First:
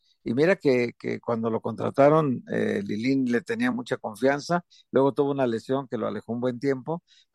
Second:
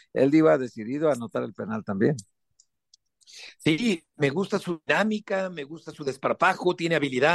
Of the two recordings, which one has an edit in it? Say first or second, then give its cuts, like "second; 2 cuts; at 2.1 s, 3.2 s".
first; 1 cut; at 3.7 s